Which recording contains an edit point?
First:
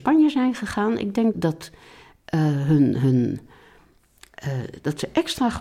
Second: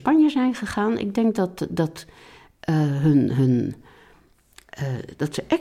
first; 1 cut; at 1.3 s

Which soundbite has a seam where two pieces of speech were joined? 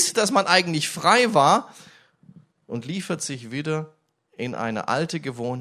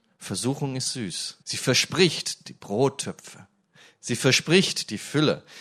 second; 1 cut; at 1.4 s

